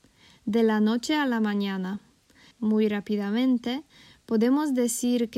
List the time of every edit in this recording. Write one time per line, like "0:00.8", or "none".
0:02.5